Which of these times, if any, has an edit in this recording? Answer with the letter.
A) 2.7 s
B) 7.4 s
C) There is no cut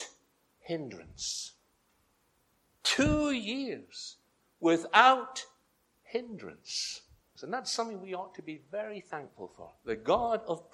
B